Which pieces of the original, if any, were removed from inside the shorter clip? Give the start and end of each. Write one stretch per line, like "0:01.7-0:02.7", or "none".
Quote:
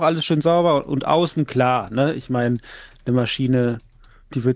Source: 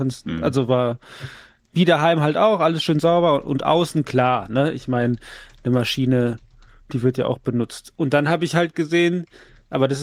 none